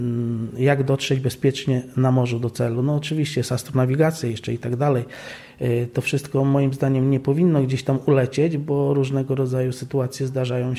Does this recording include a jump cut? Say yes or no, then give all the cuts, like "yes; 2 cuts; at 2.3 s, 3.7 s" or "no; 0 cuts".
no; 0 cuts